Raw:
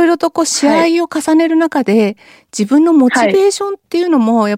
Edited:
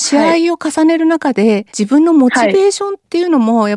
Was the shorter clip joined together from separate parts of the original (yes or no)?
yes